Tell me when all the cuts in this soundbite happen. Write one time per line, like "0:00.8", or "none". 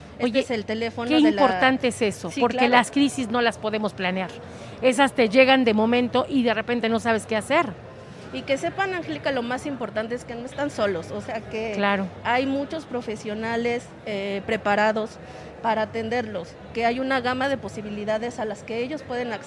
none